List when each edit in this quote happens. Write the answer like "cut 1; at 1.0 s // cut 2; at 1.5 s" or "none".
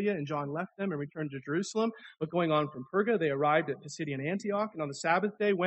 none